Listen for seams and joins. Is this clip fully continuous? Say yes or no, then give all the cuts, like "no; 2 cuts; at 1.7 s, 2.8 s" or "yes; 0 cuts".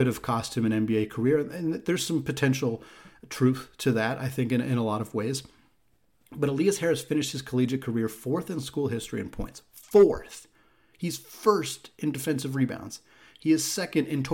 yes; 0 cuts